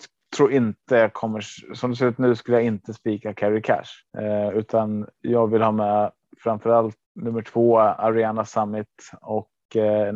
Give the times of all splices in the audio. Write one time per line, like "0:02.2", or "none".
0:04.1
0:07.0